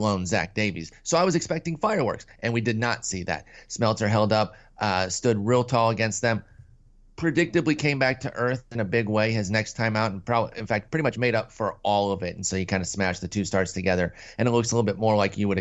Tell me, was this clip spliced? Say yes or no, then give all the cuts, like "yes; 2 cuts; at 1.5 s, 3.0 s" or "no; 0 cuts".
no; 0 cuts